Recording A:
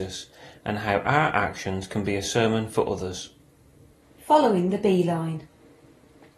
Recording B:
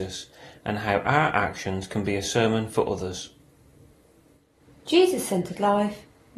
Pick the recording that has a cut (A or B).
A